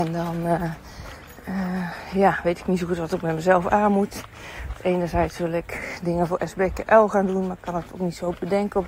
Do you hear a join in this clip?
no; 0 cuts

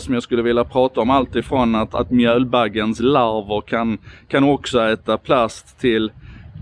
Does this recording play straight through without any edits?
yes; 0 cuts

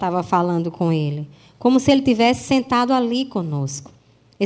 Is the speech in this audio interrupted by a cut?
no; 0 cuts

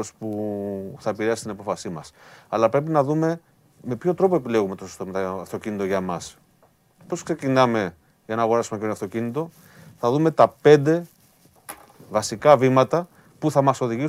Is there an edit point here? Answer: no; 0 cuts

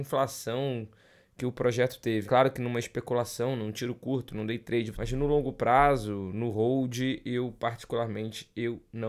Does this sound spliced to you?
yes; 2 cuts; at 2.3 s, 4.9 s

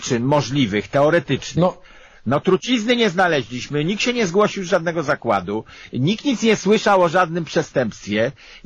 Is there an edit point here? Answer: no; 0 cuts

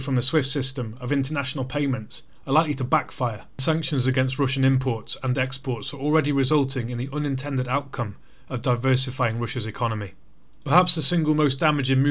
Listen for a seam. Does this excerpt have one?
no; 0 cuts

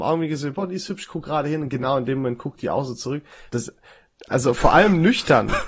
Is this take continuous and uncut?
no; 1 cut; at 3.5 s

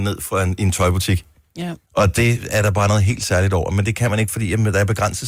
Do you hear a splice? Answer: yes; 1 cut; at 1.8 s

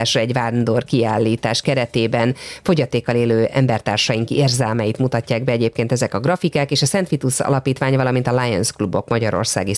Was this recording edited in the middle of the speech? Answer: no; 0 cuts

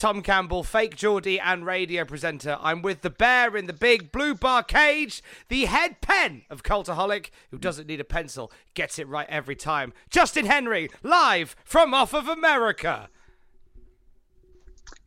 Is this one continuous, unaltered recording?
yes; 0 cuts

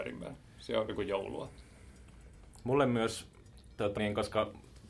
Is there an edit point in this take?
yes; 1 cut; at 4.0 s

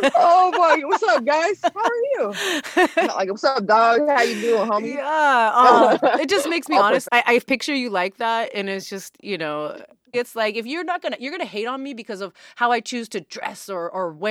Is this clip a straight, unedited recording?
no; 2 cuts; at 7.0 s, 10.1 s

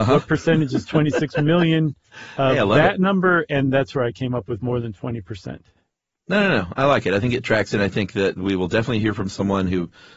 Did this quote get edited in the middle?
no; 0 cuts

